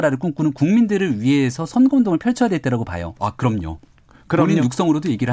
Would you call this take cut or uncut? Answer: cut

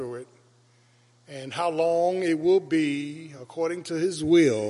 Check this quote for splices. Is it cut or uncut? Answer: uncut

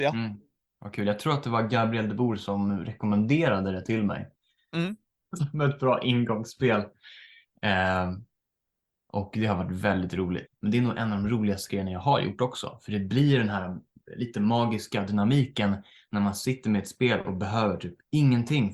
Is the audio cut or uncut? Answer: cut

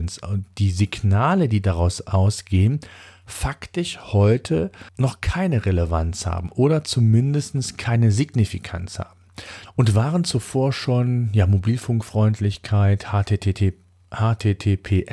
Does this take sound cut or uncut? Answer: cut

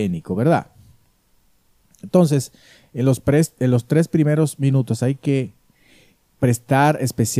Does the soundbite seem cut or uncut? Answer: uncut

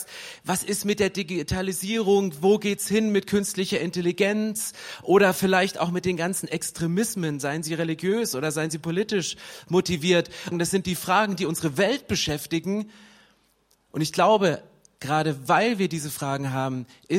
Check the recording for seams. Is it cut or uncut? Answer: cut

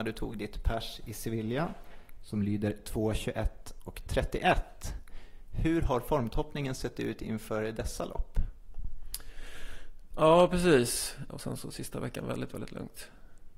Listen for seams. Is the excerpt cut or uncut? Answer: cut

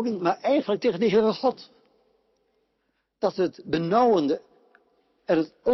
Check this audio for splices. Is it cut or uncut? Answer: uncut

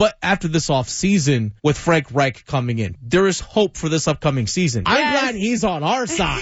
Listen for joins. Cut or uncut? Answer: cut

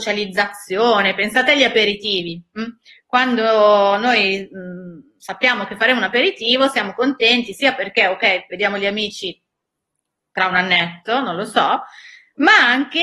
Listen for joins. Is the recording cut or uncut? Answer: uncut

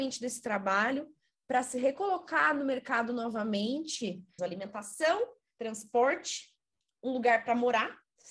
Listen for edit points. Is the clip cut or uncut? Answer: cut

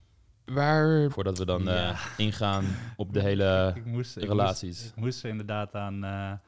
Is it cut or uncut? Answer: cut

